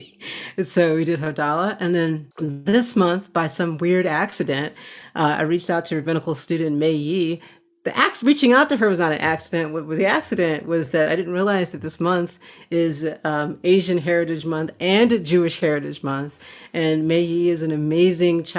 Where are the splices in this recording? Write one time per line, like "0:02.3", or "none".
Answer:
none